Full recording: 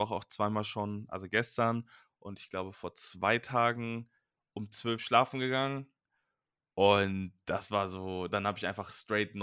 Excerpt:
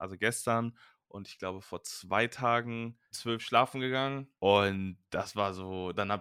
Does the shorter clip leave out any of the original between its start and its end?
yes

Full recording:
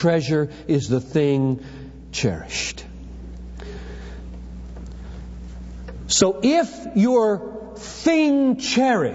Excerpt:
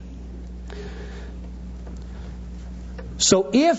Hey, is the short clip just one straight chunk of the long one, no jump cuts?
yes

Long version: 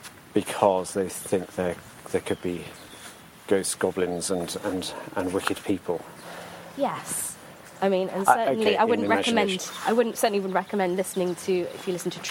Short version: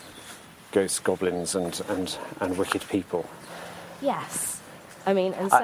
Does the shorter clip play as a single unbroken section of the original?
yes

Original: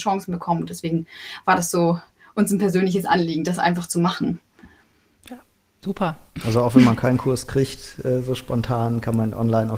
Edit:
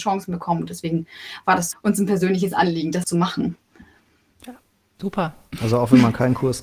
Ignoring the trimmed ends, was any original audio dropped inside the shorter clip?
yes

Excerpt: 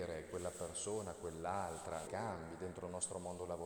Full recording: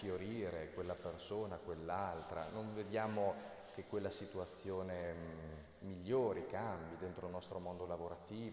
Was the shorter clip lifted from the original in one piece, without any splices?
no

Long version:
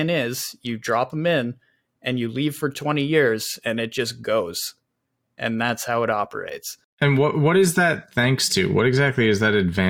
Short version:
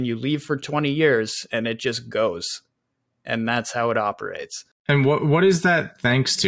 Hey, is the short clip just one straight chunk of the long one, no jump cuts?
yes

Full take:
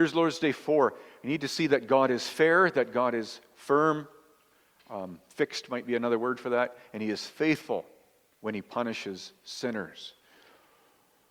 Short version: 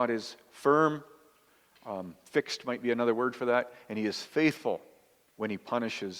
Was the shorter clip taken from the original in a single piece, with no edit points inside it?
yes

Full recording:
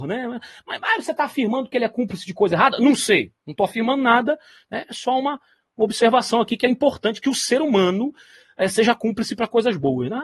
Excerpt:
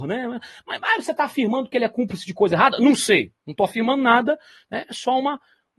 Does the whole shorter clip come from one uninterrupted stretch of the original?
yes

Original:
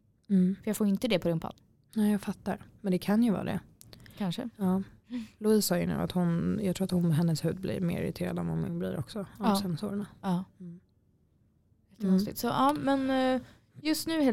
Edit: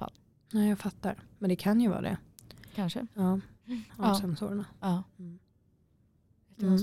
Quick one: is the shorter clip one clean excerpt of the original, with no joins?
no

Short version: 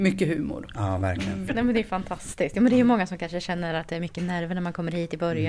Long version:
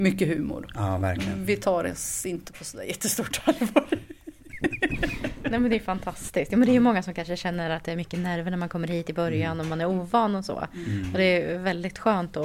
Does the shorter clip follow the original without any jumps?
no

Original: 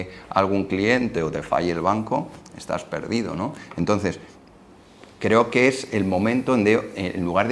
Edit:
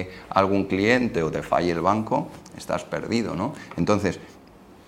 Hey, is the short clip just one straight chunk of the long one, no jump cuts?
yes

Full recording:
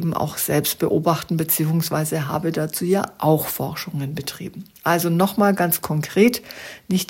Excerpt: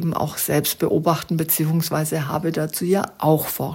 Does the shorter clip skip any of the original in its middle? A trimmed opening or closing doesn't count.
no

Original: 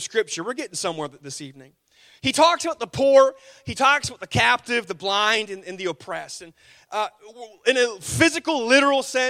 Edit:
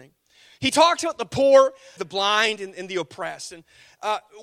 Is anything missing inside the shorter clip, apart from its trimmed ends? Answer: yes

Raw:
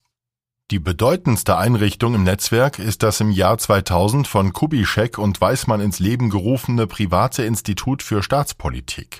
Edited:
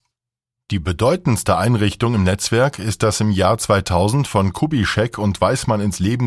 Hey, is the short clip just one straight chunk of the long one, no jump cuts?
yes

